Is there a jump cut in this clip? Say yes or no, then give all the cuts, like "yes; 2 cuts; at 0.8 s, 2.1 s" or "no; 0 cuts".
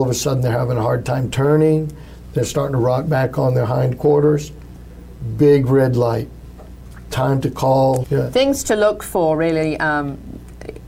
yes; 1 cut; at 8.0 s